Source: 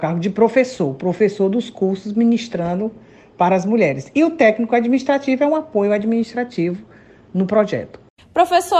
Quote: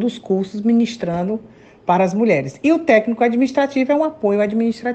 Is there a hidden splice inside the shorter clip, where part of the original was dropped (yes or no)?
no